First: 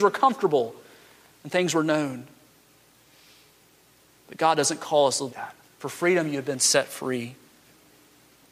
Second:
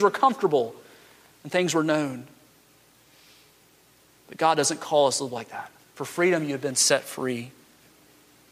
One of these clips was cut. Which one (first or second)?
first